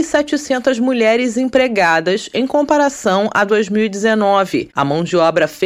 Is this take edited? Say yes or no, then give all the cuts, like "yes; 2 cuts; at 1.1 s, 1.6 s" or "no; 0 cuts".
no; 0 cuts